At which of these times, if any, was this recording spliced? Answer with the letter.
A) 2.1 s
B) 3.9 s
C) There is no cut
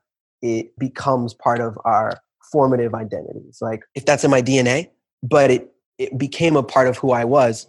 B